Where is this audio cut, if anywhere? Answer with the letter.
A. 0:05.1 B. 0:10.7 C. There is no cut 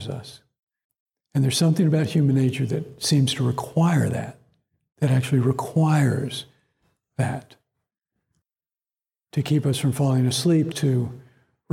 B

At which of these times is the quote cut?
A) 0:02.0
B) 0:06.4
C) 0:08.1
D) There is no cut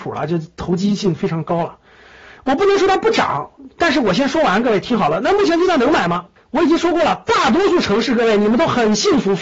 B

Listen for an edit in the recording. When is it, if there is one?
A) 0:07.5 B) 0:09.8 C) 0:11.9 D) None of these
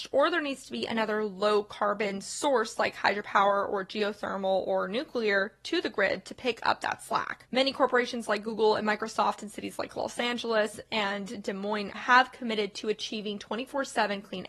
C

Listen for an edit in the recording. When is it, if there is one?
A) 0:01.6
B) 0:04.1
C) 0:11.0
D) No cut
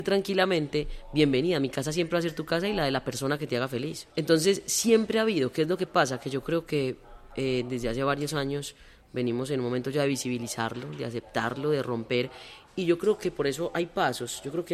B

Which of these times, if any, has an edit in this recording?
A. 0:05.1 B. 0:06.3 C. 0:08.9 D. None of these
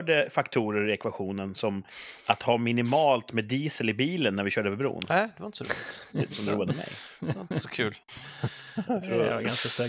B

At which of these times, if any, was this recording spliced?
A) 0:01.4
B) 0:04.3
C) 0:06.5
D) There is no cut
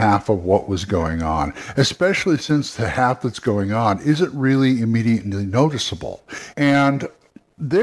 C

